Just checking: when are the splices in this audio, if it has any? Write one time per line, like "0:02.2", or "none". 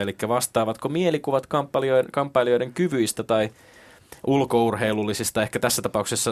none